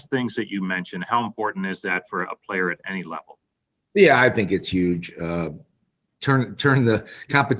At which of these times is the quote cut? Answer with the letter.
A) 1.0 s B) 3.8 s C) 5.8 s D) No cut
D